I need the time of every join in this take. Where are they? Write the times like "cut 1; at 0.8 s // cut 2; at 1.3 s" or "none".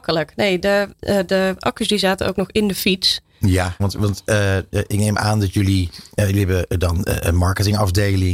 cut 1; at 0.9 s // cut 2; at 3.8 s